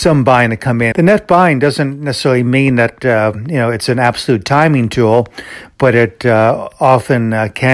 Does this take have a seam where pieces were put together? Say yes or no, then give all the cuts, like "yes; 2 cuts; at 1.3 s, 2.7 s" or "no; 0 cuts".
yes; 1 cut; at 0.9 s